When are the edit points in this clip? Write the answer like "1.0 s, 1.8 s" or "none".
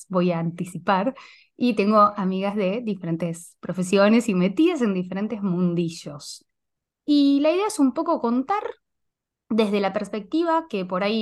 6.8 s